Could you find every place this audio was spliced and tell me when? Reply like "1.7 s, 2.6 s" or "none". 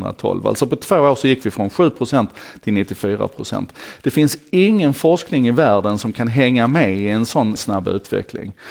7.6 s